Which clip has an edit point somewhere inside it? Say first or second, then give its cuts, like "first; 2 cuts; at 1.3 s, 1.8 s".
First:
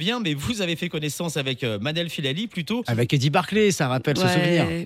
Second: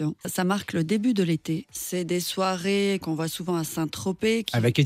first; 1 cut; at 2.8 s